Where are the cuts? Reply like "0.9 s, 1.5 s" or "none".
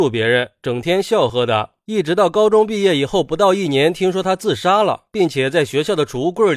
1.3 s